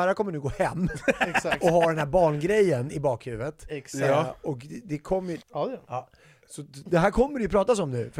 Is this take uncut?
no; 1 cut; at 5.4 s

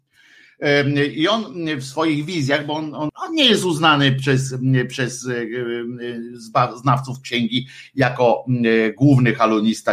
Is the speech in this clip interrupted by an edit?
yes; 1 cut; at 3.1 s

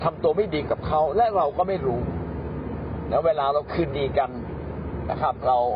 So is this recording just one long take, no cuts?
yes; 0 cuts

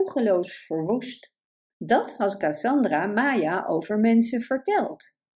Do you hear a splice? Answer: yes; 1 cut; at 1.7 s

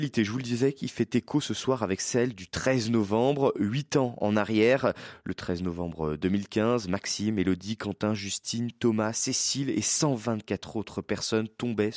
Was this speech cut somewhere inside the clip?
no; 0 cuts

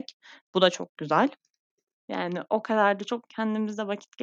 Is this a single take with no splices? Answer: no; 1 cut; at 2.0 s

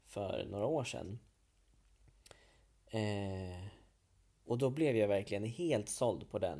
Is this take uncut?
yes; 0 cuts

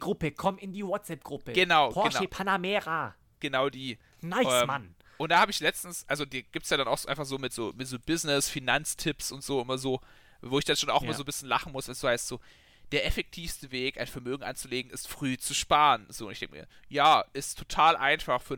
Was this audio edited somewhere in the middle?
no; 0 cuts

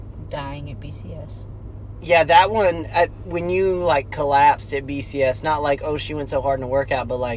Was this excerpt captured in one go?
yes; 0 cuts

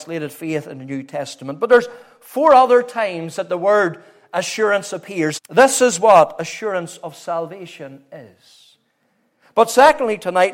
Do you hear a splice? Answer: yes; 1 cut; at 5.4 s

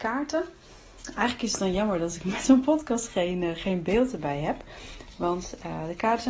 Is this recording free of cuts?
yes; 0 cuts

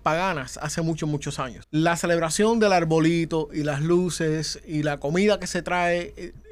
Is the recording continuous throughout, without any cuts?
no; 1 cut; at 1.6 s

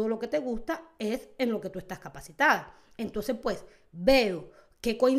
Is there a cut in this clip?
no; 0 cuts

